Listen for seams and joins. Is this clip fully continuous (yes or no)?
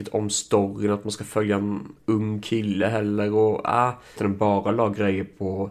no